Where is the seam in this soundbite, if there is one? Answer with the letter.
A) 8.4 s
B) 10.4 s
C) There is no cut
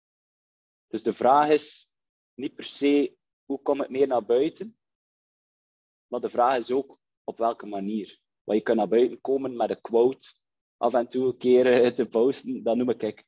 C